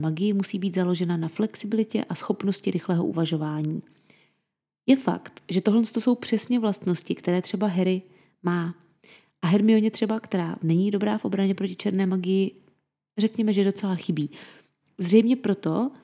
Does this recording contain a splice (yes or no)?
no